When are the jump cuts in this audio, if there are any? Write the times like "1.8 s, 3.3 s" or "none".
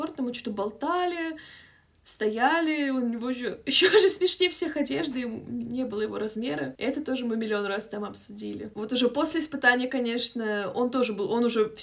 none